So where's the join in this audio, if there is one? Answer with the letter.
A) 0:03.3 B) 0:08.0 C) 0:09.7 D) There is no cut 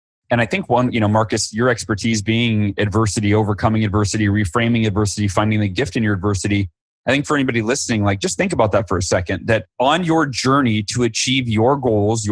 C